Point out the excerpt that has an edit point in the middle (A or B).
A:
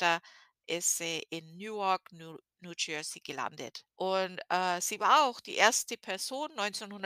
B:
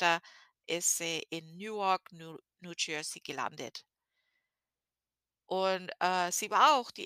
A